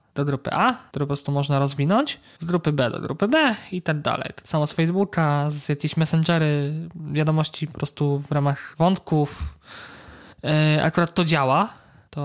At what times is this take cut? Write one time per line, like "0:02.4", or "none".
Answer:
0:00.9